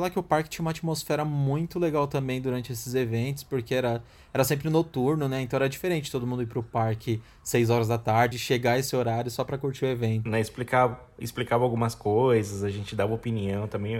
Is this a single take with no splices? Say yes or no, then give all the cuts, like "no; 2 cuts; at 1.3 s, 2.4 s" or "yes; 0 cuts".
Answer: no; 2 cuts; at 8.3 s, 10.3 s